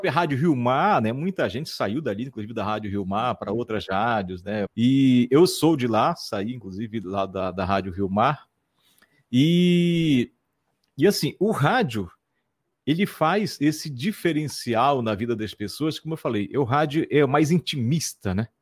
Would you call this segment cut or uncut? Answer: cut